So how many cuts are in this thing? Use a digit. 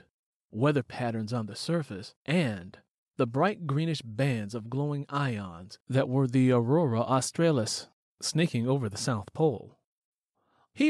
2